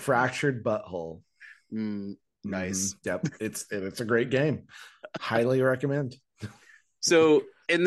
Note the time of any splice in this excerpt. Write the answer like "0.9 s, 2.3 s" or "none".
none